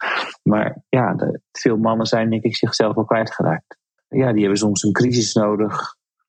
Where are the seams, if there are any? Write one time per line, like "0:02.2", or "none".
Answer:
0:04.0

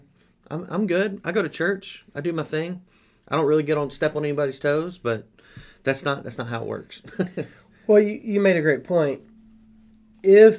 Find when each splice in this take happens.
none

